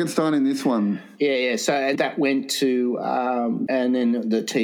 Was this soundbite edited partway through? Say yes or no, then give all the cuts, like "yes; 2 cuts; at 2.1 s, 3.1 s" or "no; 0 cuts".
yes; 2 cuts; at 1.9 s, 3.7 s